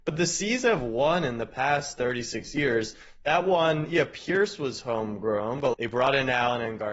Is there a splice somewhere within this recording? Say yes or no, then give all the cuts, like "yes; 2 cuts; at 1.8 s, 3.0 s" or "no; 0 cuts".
yes; 1 cut; at 5.7 s